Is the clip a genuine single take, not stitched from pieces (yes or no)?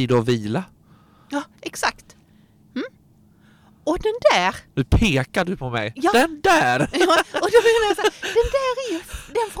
no